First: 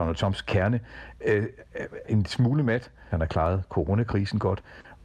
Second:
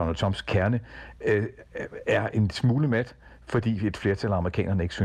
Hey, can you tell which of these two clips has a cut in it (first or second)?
first